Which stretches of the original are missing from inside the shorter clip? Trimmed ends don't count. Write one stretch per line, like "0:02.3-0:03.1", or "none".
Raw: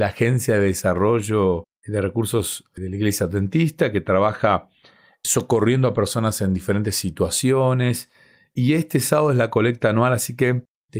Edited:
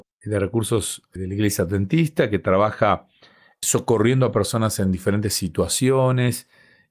none